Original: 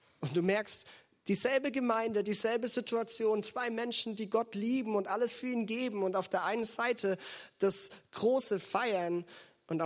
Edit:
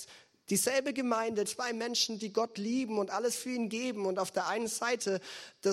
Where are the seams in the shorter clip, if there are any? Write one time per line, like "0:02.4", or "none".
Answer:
0:01.4

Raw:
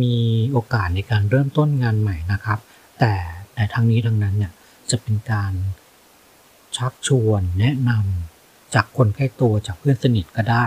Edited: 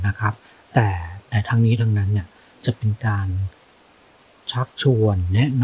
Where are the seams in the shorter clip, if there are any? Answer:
none

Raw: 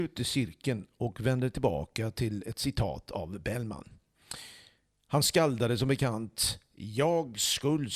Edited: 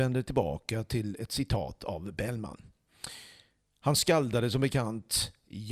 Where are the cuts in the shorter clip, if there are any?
none

